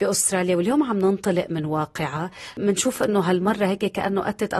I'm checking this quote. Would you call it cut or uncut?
cut